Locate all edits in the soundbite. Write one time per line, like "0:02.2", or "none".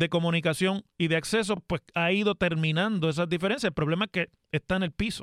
none